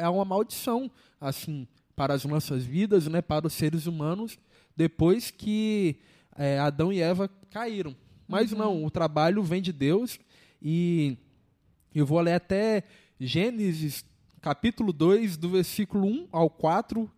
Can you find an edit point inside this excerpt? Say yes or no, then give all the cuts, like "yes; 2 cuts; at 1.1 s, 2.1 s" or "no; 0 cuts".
no; 0 cuts